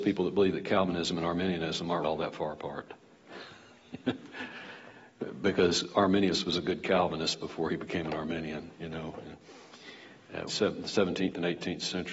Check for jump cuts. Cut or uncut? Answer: cut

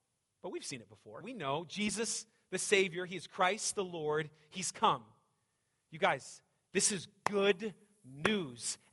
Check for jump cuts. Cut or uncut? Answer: cut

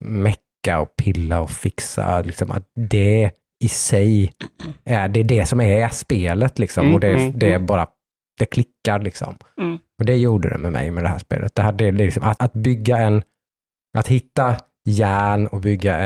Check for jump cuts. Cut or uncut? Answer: cut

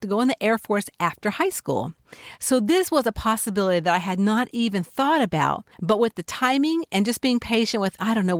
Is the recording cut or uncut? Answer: cut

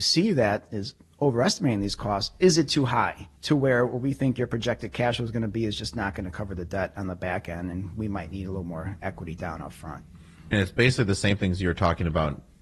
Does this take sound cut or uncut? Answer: cut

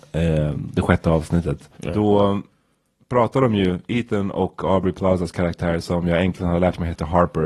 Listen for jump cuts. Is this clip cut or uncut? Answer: cut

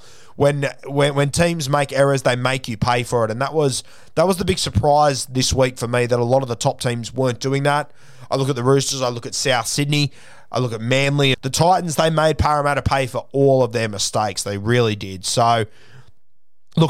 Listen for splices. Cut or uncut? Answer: cut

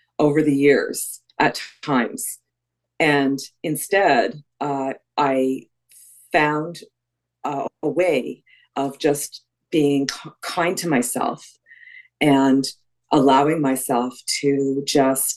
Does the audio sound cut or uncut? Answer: uncut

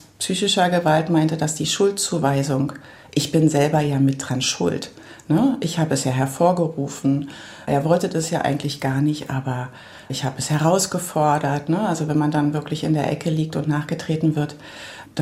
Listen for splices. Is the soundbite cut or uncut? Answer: uncut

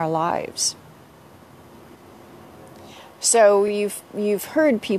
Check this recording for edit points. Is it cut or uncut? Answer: uncut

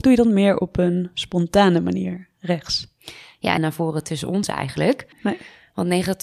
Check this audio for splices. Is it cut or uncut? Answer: cut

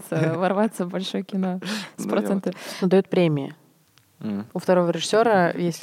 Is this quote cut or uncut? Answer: cut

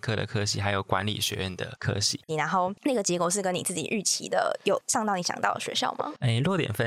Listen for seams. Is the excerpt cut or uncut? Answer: cut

